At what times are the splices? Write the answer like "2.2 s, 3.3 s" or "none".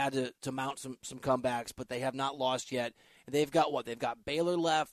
none